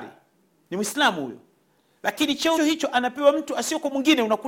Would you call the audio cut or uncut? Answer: cut